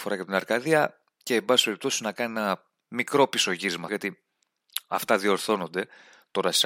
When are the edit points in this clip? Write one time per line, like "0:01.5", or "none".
0:03.9